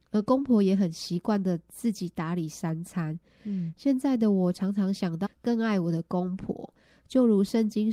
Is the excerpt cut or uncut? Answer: cut